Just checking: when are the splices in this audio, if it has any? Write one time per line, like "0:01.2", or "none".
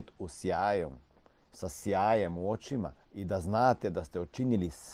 0:03.0

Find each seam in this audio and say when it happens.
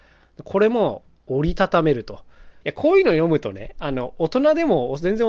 0:02.6

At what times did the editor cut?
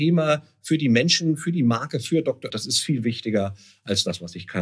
0:02.5

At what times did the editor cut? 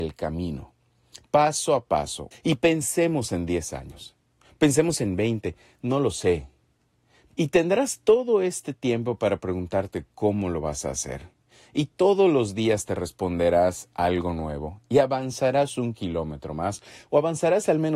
0:02.3
0:07.3

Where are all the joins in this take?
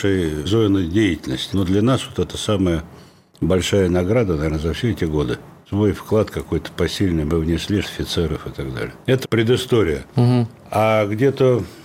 0:01.5
0:07.8
0:09.2

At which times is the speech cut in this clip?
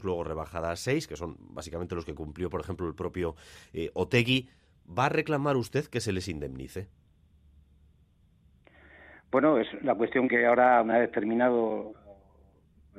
none

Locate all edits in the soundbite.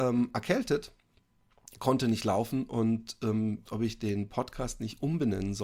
0:03.7

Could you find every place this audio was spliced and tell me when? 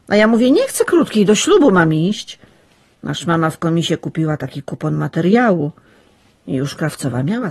0:02.9

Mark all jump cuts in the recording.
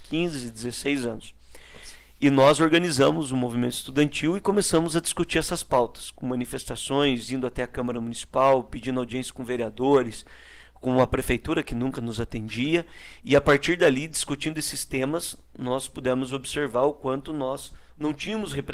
none

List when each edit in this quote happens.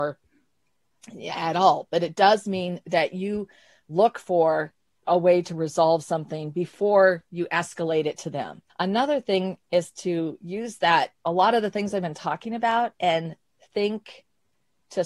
0:08.7
0:11.2

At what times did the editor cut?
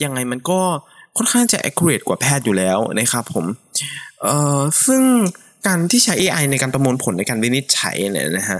none

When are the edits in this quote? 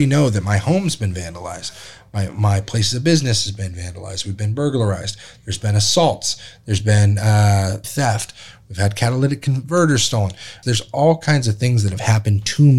0:07.8
0:10.6

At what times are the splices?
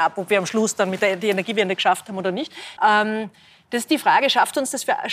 0:02.8

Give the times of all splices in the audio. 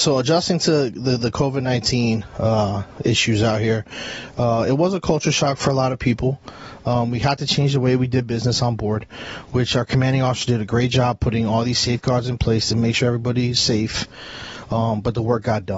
none

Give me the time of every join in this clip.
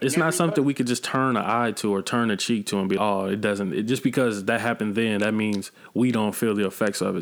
0:03.0

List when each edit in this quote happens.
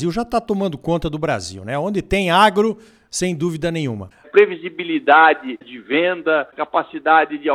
0:03.1
0:04.2

